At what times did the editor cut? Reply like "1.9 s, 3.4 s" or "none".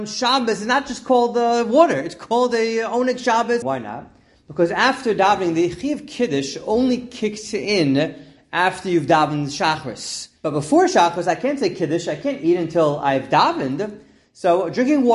3.6 s, 10.4 s